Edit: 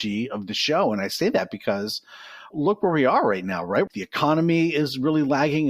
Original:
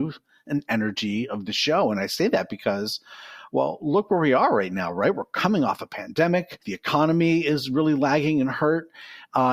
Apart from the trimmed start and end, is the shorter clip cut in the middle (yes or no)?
yes